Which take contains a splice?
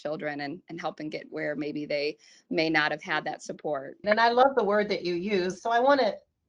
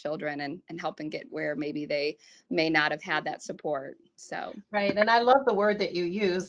first; 2 cuts; at 4.0 s, 5.6 s

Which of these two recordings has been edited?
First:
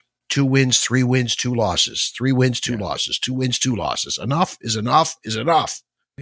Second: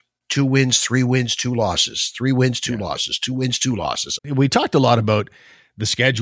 second; 1 cut; at 4.2 s

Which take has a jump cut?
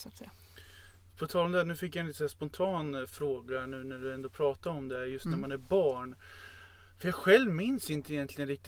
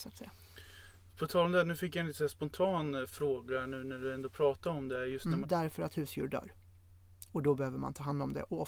second; 1 cut; at 5.4 s

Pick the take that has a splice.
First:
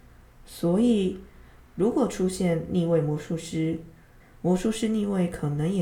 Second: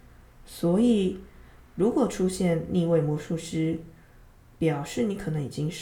first; 1 cut; at 4.2 s

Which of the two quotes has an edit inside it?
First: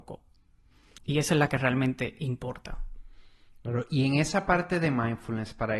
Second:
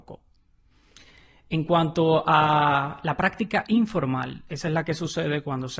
first; 1 cut; at 1.0 s

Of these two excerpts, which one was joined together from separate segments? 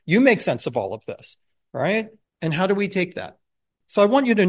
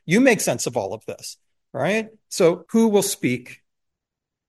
first; 1 cut; at 2.2 s

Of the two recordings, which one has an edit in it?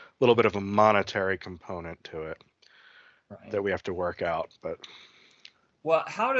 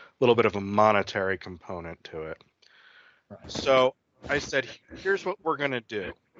second; 1 cut; at 3.4 s

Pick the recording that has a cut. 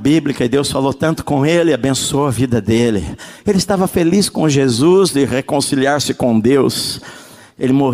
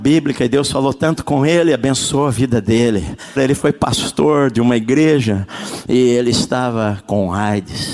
second; 2 cuts; at 3.4 s, 5.8 s

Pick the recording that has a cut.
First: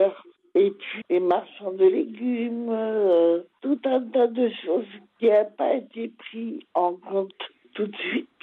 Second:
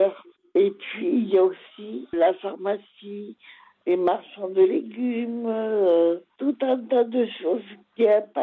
first; 1 cut; at 1.0 s

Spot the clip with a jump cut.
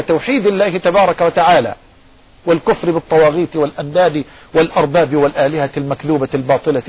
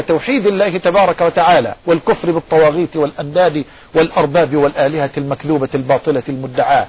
second; 1 cut; at 1.8 s

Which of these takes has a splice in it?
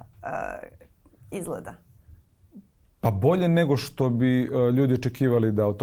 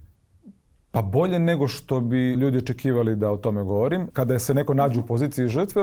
second; 2 cuts; at 2.4 s, 4.1 s

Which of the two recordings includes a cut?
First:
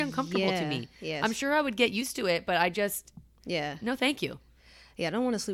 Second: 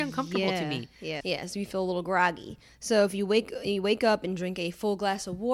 second; 1 cut; at 1.2 s

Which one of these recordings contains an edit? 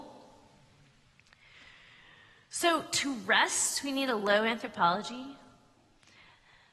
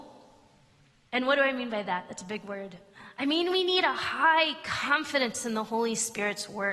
second; 1 cut; at 1.1 s

